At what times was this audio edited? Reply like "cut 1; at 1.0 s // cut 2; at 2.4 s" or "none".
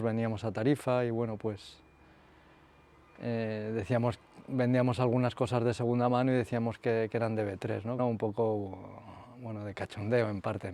cut 1; at 8.0 s